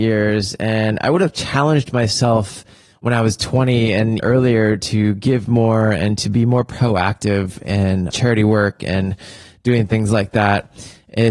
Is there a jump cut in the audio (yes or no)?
yes